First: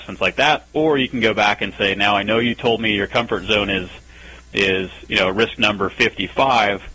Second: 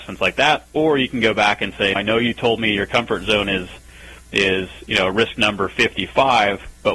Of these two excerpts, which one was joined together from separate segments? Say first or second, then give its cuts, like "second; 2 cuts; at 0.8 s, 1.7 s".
second; 1 cut; at 2.0 s